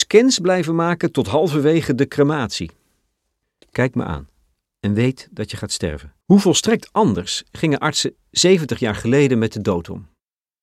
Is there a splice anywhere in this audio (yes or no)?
yes